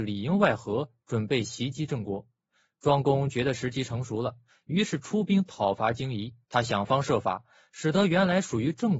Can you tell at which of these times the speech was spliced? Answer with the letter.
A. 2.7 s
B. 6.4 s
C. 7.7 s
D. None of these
B